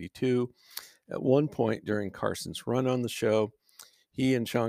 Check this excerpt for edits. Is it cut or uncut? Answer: uncut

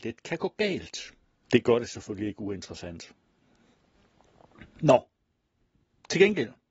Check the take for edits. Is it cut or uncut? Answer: cut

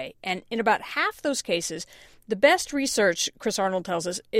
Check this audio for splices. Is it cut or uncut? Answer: uncut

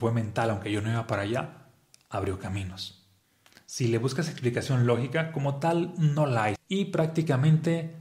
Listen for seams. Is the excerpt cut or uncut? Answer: cut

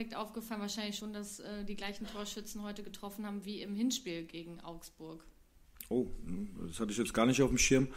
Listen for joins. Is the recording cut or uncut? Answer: uncut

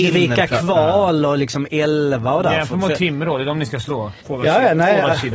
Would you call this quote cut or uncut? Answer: cut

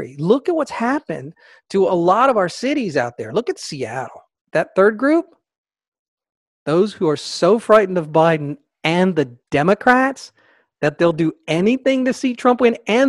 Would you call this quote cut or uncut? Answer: cut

